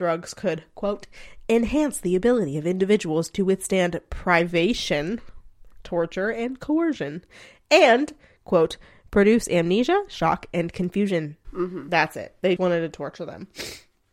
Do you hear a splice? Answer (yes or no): yes